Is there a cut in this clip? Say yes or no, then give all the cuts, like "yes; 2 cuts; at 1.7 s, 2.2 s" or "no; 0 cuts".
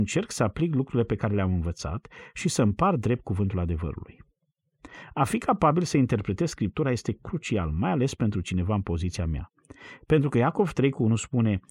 no; 0 cuts